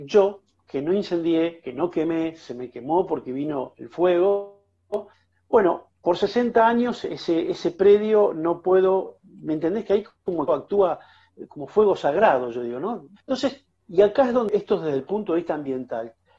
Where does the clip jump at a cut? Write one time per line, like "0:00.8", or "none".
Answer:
0:09.2
0:13.2